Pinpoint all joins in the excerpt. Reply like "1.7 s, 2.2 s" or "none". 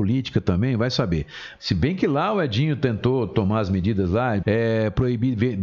1.6 s, 4.4 s